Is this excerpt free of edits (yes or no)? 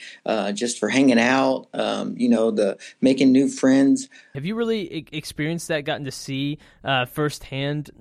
no